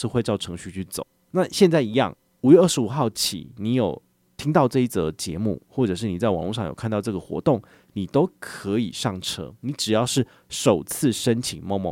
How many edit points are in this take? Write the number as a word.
zero